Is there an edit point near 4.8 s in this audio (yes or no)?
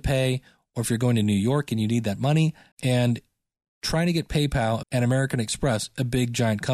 yes